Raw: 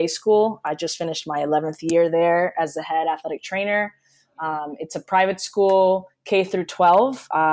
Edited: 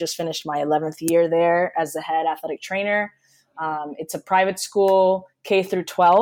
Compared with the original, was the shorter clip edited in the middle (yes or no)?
no